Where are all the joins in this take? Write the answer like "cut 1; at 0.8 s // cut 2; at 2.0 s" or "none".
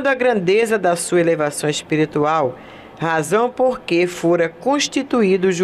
none